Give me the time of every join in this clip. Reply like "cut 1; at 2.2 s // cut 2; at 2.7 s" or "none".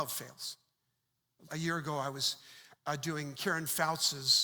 cut 1; at 1.5 s

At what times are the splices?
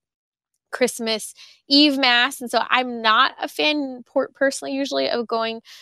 none

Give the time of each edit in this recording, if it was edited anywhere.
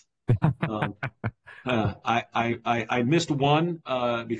none

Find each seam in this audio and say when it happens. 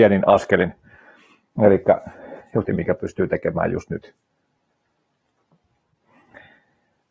cut 1; at 2.6 s

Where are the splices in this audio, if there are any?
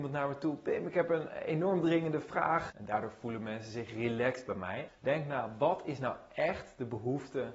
cut 1; at 2.7 s // cut 2; at 4.9 s

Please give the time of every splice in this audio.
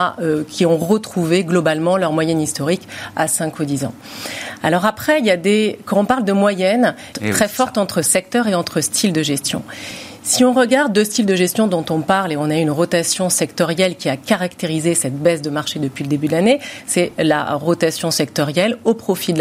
cut 1; at 7.1 s

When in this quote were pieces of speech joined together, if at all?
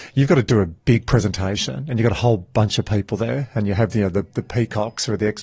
none

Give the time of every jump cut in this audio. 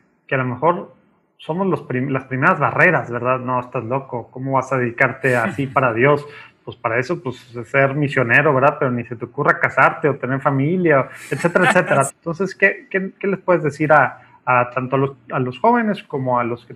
cut 1; at 12.1 s

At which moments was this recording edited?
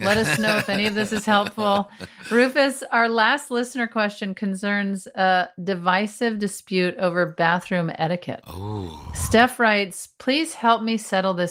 none

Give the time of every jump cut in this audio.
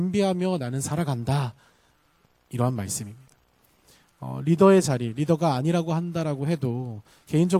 none

